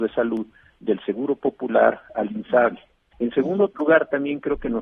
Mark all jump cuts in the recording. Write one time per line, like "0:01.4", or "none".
0:03.1